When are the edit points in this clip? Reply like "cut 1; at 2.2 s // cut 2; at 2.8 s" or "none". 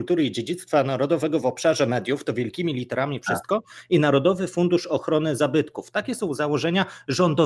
none